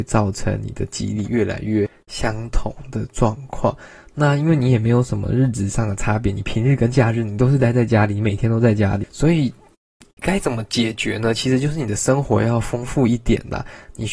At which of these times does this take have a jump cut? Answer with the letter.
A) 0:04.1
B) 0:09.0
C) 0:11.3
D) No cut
B